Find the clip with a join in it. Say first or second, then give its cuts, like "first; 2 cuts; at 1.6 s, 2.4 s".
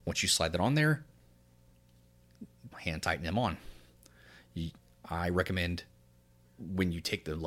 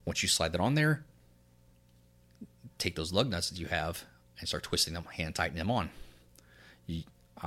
first; 1 cut; at 2.7 s